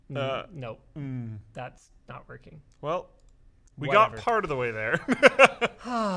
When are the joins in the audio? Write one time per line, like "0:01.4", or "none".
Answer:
none